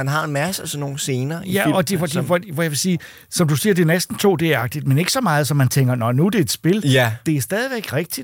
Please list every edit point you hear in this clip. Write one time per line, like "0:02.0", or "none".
none